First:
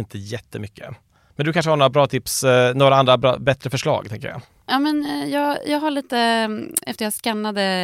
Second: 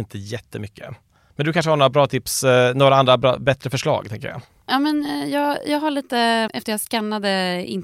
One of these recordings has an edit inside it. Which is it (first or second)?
second